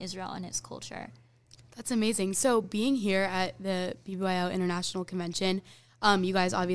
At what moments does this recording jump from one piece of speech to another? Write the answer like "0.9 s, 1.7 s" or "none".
none